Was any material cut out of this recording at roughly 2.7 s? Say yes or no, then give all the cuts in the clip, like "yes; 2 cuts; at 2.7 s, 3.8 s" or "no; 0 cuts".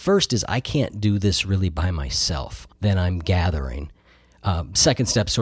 yes; 1 cut; at 2.7 s